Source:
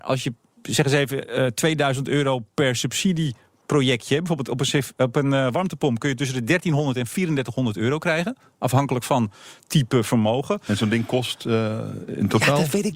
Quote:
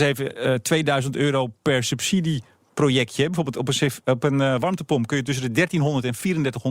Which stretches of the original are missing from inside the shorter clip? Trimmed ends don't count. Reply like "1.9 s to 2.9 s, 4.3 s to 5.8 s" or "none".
none